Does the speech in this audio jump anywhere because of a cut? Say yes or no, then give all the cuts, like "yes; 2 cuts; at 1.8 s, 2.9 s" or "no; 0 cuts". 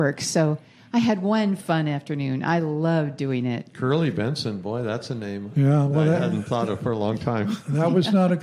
no; 0 cuts